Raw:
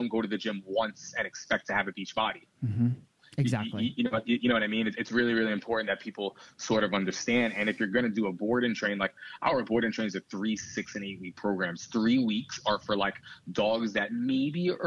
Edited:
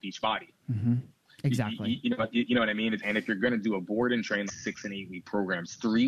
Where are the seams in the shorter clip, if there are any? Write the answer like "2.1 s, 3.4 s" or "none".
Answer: 3.0 s, 4.5 s